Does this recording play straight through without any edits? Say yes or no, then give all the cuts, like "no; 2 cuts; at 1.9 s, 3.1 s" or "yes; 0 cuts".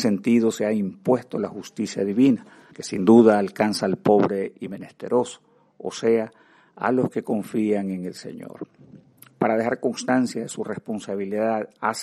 no; 1 cut; at 2.7 s